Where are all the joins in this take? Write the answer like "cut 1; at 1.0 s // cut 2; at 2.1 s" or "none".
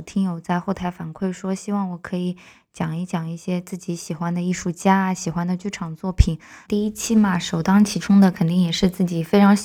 cut 1; at 6.6 s